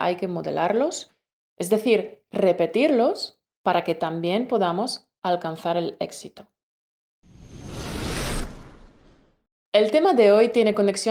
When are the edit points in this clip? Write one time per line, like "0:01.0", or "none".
none